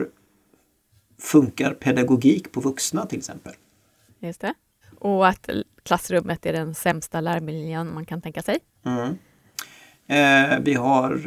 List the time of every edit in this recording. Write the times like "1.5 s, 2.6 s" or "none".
4.1 s